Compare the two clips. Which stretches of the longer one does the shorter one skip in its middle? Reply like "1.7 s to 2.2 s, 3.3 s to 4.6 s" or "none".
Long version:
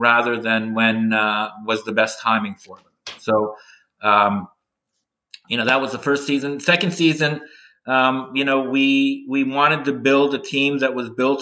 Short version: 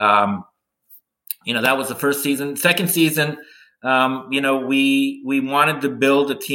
none